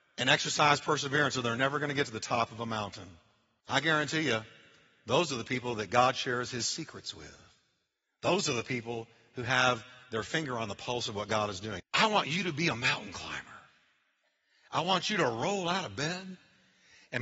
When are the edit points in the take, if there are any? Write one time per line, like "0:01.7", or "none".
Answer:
0:03.6
0:11.8

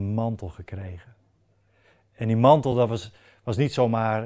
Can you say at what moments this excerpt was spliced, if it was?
none

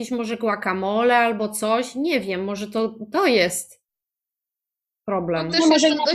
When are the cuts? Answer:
none

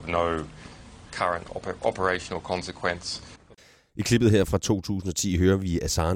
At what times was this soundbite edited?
none

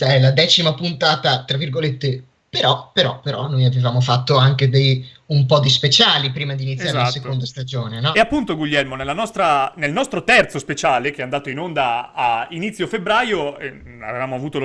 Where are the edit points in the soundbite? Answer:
0:02.4

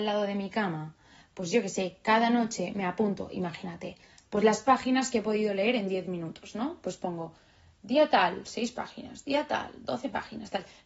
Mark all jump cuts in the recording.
none

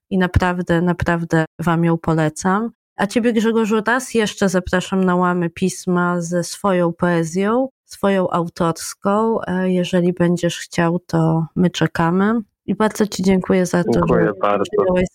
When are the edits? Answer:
none

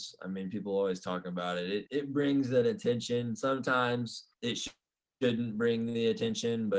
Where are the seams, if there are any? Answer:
0:01.9
0:04.3

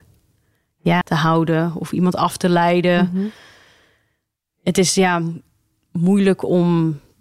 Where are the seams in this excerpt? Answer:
0:01.0

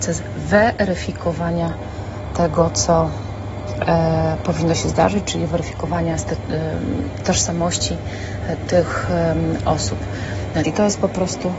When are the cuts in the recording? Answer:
0:10.6

